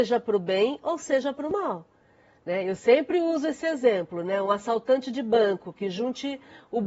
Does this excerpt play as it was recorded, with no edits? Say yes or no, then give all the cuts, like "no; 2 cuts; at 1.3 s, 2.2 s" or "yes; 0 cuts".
yes; 0 cuts